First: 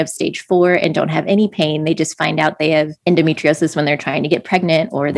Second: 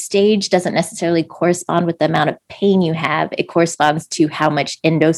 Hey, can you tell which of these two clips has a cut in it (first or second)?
first